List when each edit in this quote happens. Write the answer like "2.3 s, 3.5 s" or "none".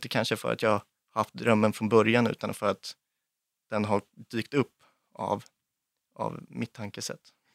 none